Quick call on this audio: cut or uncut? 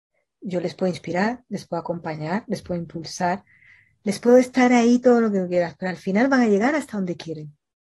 uncut